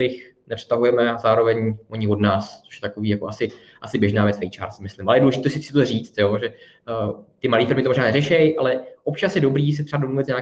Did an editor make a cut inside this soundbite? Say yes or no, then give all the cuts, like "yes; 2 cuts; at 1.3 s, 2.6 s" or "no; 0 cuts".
no; 0 cuts